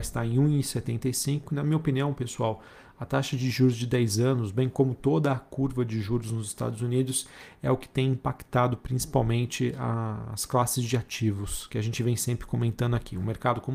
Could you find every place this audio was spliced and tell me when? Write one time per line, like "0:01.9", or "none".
none